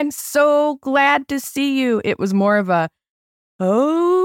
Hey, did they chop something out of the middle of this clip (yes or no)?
no